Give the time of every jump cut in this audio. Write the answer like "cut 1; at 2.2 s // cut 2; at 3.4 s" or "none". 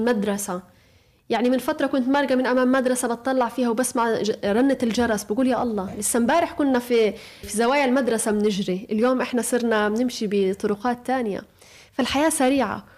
cut 1; at 7.4 s